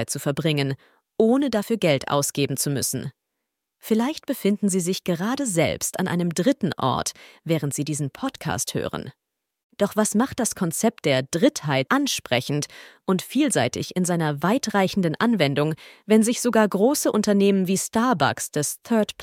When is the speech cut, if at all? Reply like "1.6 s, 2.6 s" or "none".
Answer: 11.9 s